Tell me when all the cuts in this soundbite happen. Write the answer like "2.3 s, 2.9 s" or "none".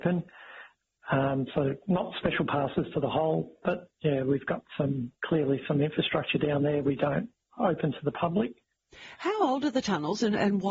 none